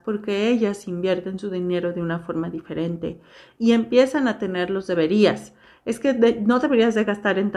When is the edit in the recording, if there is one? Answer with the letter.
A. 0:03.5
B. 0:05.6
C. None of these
C